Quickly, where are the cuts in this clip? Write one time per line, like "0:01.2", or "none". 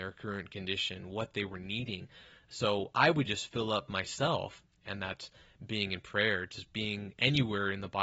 0:04.8